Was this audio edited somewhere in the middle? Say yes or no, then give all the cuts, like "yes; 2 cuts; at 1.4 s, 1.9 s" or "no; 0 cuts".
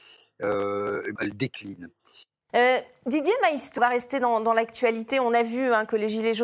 yes; 3 cuts; at 1.2 s, 2.5 s, 3.8 s